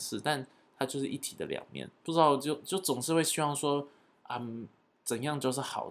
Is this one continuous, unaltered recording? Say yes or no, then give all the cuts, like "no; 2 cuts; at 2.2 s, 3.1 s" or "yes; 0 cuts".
yes; 0 cuts